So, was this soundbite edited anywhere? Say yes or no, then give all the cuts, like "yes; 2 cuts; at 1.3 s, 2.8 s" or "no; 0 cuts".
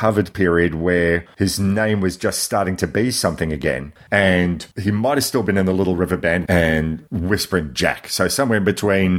yes; 1 cut; at 6.4 s